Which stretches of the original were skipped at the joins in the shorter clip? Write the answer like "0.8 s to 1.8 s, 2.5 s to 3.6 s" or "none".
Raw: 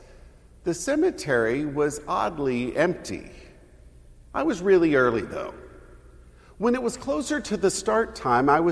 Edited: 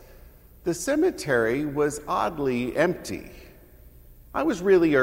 none